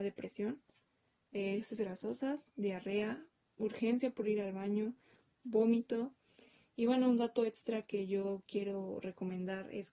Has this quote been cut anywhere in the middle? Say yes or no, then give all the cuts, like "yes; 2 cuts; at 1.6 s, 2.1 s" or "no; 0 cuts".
no; 0 cuts